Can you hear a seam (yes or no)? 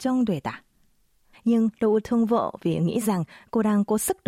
yes